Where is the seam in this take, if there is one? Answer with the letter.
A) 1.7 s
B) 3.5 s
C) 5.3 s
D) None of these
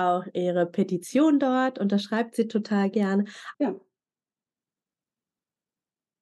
B